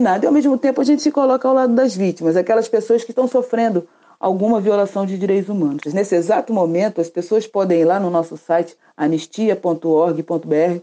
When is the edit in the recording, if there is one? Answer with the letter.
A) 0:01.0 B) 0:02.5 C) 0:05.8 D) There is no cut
C